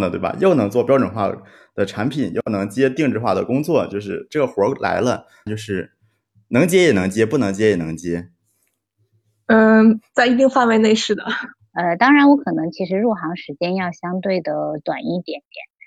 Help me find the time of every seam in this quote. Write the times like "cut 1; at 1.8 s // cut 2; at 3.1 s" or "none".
cut 1; at 5.5 s // cut 2; at 11.6 s